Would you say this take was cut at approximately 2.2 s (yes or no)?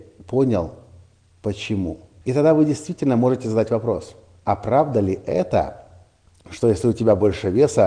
yes